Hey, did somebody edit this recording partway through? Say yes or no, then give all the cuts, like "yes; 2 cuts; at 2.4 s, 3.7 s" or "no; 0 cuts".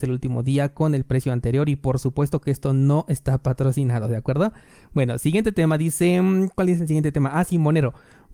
no; 0 cuts